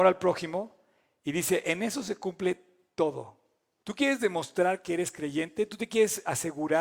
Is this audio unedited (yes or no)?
no